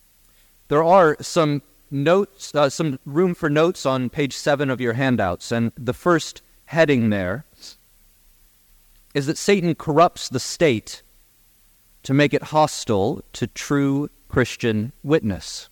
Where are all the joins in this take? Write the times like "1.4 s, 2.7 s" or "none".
none